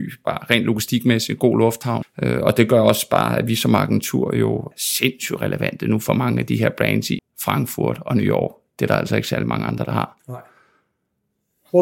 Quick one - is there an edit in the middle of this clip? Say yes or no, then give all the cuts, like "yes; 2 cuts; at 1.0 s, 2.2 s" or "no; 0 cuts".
yes; 3 cuts; at 2.0 s, 4.7 s, 7.2 s